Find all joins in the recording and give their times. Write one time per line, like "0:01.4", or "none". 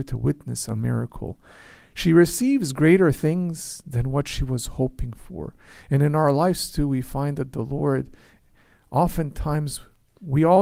none